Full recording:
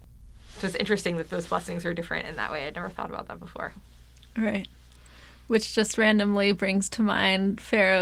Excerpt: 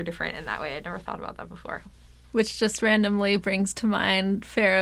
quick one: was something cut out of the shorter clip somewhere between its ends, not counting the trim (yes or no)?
yes